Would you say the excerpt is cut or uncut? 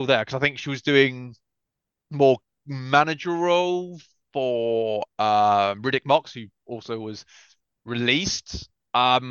uncut